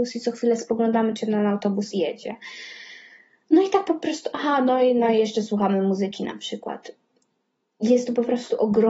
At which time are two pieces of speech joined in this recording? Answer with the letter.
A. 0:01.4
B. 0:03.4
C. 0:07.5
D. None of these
D